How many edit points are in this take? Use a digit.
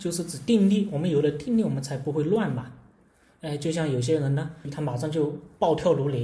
1